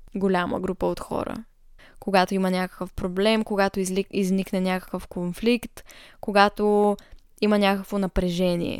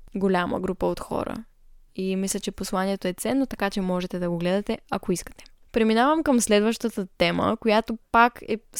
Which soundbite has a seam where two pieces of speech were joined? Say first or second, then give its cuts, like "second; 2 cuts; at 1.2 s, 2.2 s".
first; 1 cut; at 1.8 s